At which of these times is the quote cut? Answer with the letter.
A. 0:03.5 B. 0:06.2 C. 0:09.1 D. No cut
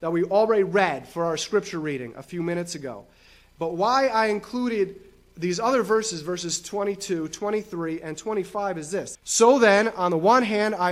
C